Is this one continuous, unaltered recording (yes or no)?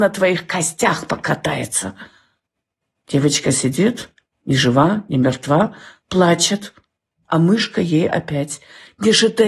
yes